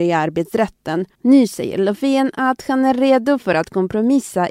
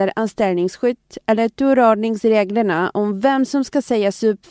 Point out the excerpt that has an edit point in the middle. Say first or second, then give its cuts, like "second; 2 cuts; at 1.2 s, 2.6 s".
first; 1 cut; at 1.1 s